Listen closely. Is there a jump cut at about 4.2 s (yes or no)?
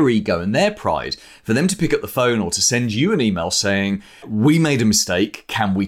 yes